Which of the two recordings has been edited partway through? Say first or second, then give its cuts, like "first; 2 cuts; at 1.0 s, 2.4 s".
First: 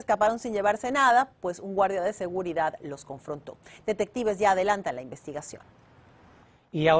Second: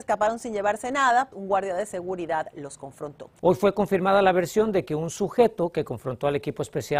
second; 2 cuts; at 1.3 s, 3.4 s